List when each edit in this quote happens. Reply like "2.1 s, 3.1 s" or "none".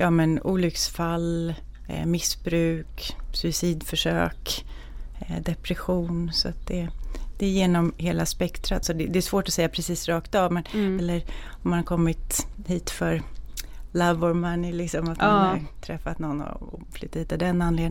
8.8 s, 11.0 s